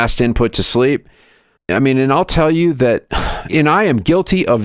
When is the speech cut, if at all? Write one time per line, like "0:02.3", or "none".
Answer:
0:01.6
0:03.5

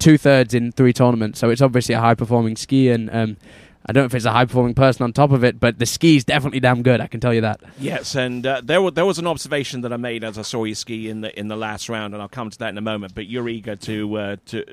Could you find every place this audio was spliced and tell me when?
none

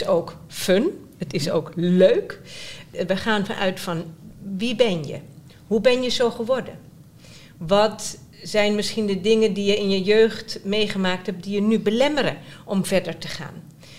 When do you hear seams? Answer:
none

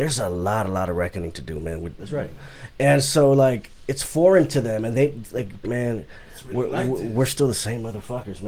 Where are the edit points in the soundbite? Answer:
0:02.0
0:05.6

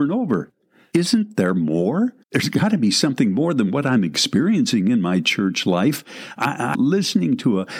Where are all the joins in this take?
0:02.2
0:06.7

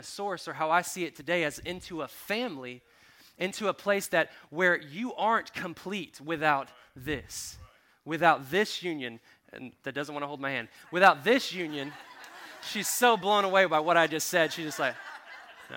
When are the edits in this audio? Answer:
none

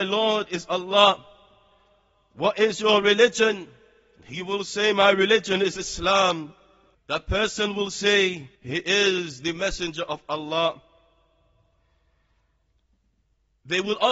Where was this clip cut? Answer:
0:06.9
0:08.6

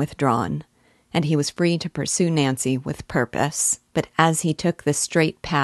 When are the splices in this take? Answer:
0:03.9

